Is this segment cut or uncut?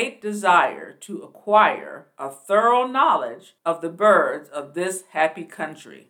uncut